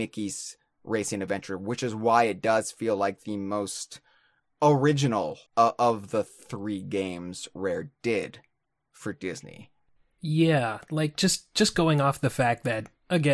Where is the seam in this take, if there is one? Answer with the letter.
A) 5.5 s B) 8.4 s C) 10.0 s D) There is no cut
A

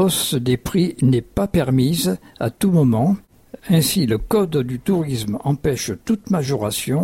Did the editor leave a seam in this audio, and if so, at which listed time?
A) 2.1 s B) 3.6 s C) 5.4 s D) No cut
B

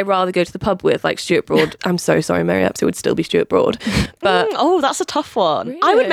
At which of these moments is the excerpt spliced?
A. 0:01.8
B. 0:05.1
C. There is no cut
A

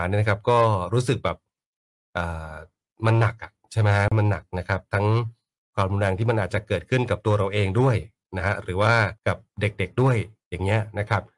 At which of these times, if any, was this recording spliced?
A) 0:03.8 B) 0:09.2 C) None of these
B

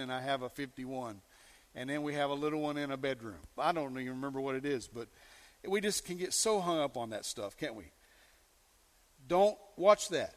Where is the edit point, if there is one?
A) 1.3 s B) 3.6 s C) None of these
B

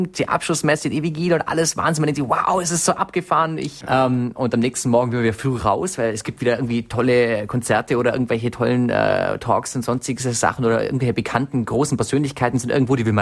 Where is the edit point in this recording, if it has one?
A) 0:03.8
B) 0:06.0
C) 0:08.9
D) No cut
A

